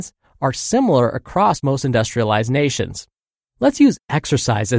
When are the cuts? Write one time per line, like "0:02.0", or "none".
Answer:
0:03.4